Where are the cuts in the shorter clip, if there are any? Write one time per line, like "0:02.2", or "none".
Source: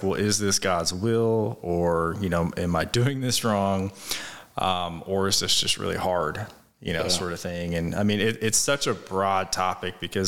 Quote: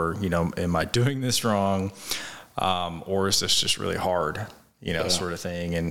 none